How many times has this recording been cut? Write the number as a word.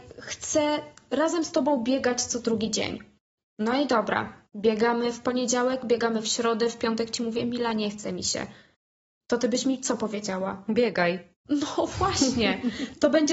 zero